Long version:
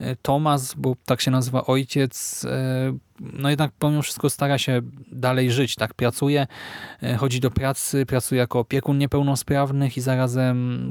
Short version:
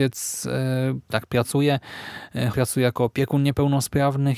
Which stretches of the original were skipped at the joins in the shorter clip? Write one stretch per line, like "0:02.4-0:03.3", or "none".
0:03.1-0:05.8
0:07.2-0:08.1